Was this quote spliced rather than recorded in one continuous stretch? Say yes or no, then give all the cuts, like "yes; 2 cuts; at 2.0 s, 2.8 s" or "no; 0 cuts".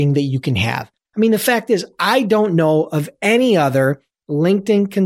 yes; 1 cut; at 1.1 s